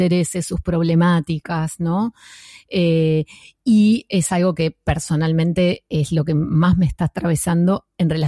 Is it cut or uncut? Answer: uncut